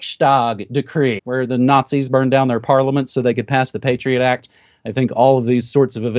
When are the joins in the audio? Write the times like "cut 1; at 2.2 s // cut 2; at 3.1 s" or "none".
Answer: cut 1; at 1.2 s